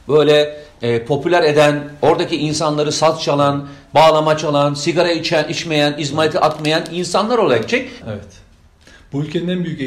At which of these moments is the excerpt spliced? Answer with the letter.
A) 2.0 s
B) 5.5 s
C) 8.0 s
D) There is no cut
C